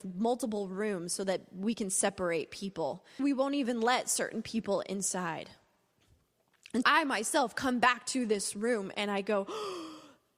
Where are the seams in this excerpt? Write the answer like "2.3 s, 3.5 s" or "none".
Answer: 3.2 s, 6.8 s